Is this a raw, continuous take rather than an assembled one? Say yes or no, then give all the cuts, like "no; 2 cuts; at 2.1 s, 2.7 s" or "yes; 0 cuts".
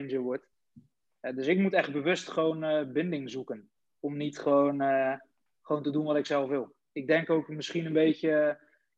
no; 2 cuts; at 5.5 s, 6.9 s